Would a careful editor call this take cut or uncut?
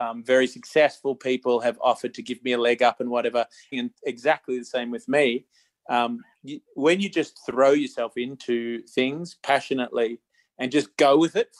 cut